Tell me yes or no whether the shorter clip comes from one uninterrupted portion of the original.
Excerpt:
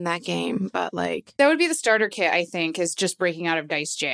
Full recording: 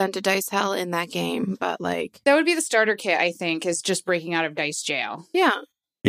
yes